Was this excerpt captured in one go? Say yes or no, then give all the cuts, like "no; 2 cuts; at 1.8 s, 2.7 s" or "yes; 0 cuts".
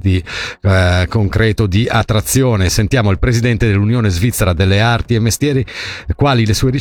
yes; 0 cuts